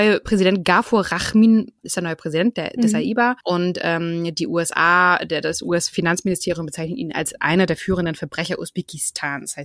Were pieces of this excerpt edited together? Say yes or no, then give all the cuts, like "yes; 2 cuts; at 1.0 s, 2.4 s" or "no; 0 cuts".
yes; 2 cuts; at 1.8 s, 3.4 s